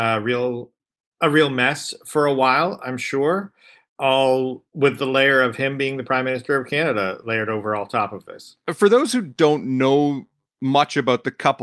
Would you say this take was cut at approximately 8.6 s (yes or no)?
no